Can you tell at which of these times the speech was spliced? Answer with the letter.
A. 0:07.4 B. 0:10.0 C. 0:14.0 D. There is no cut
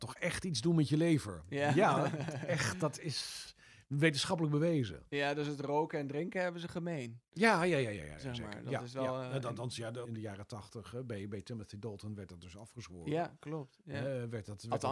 B